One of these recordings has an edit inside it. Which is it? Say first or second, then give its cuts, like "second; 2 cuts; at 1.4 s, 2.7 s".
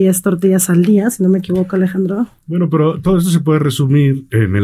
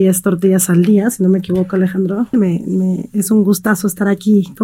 second; 1 cut; at 2.3 s